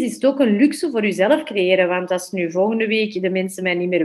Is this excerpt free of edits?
yes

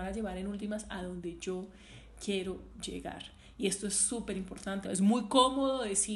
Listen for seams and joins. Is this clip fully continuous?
no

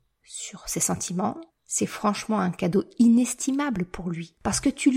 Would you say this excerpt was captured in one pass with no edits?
no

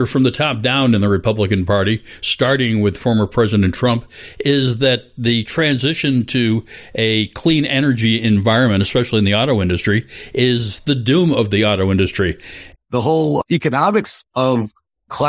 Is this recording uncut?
no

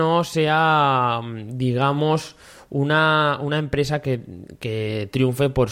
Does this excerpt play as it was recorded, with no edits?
yes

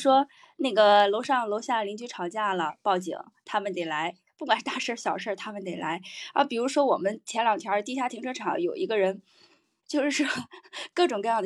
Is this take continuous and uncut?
no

